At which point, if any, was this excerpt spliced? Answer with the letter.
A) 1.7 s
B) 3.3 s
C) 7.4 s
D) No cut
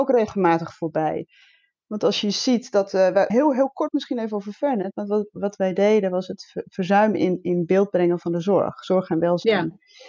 B